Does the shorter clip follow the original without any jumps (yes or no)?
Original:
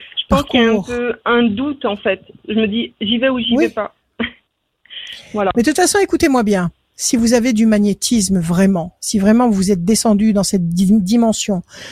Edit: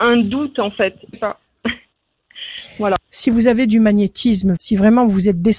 no